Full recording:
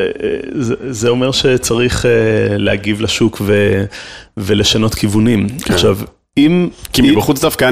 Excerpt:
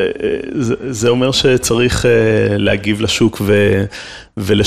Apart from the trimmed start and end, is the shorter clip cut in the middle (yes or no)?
no